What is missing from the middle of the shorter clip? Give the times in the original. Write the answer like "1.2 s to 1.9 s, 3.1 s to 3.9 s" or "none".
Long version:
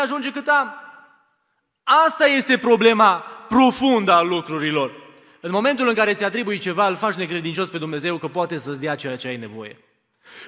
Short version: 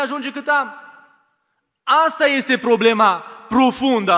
none